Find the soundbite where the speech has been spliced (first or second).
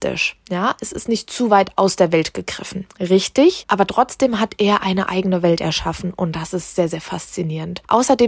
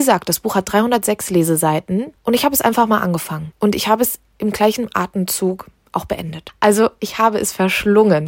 first